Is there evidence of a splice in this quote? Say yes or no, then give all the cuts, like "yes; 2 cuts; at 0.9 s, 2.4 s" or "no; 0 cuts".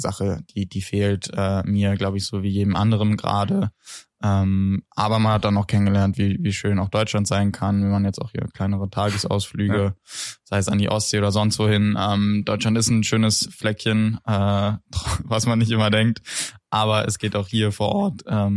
no; 0 cuts